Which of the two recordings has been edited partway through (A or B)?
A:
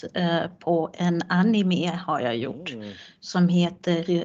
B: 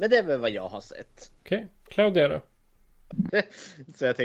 B